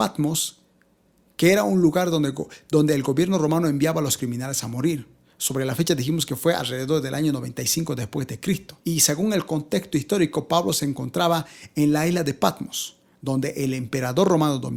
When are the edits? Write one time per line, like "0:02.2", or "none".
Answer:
0:08.8